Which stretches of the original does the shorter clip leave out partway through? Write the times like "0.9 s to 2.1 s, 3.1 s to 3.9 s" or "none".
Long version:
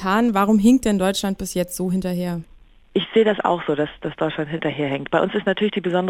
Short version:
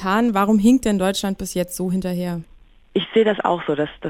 none

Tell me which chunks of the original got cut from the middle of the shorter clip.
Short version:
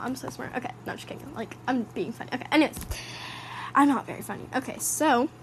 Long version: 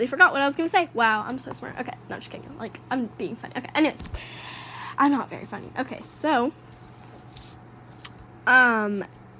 none

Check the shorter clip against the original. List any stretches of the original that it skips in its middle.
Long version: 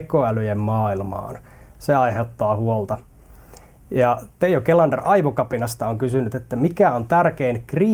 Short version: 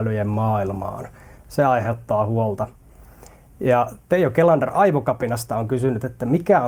none

